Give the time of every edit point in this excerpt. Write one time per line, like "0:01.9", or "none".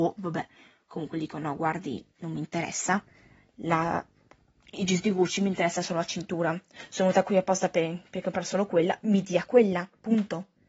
none